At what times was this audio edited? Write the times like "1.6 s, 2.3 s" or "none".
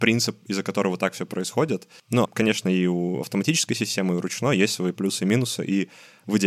2.2 s, 4.9 s